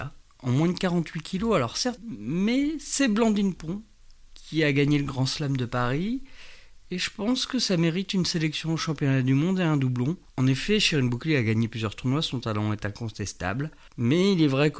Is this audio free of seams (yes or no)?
no